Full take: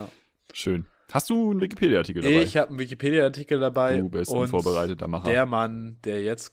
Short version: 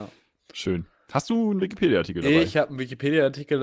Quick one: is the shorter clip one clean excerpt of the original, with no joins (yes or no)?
yes